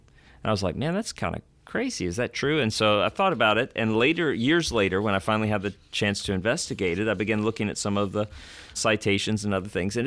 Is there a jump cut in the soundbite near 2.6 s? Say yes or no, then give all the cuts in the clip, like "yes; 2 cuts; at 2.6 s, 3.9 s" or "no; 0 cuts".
no; 0 cuts